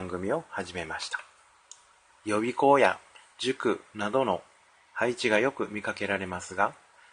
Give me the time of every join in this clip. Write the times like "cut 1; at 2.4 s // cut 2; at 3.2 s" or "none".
cut 1; at 2.2 s